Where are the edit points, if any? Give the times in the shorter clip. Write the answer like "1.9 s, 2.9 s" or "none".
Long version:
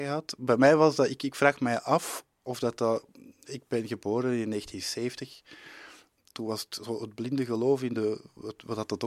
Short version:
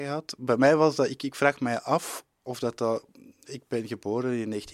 none

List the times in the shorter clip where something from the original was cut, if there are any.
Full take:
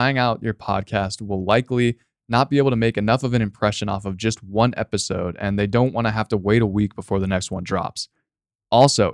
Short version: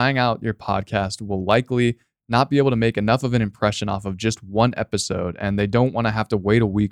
none

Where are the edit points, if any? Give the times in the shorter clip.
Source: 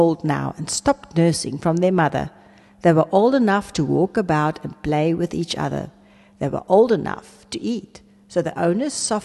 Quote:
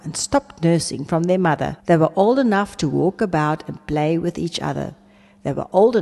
1.8 s

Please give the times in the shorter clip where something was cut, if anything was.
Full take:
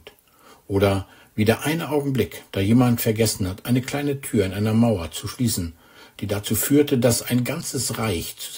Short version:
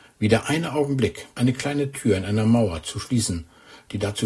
1.3 s

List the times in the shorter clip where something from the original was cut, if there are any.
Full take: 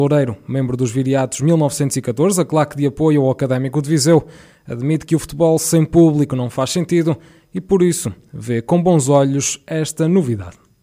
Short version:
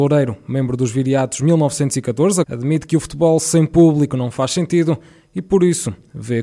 2.4 s

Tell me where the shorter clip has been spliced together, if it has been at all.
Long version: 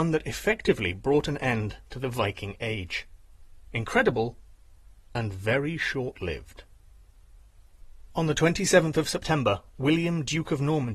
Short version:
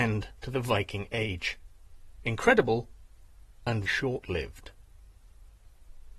3.9 s

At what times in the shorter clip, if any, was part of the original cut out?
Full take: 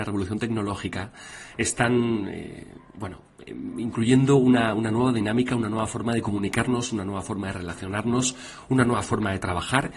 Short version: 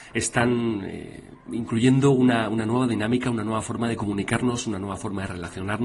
1.5 s

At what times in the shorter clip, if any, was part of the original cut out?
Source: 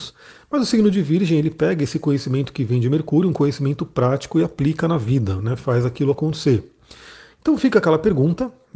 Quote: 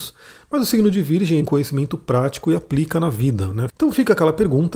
1.4 s, 3.7 s

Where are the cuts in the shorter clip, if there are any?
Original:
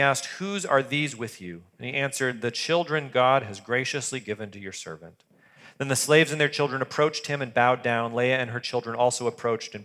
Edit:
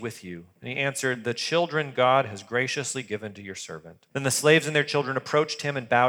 4.1 s

